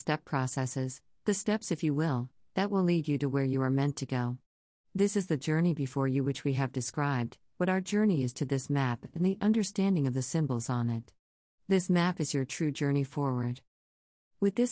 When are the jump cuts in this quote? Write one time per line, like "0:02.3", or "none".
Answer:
0:11.5